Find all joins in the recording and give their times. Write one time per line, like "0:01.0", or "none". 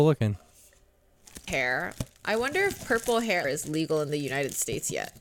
0:01.5
0:03.4